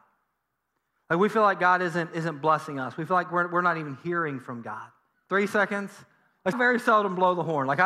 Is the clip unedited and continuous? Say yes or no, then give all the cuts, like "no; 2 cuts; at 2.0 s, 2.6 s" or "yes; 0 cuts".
no; 2 cuts; at 5.1 s, 6.5 s